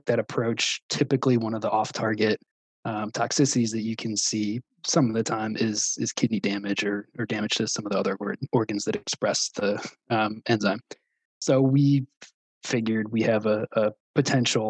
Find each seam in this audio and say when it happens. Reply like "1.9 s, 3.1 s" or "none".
none